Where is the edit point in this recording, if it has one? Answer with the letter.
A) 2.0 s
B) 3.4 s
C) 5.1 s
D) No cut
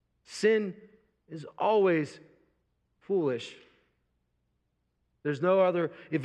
D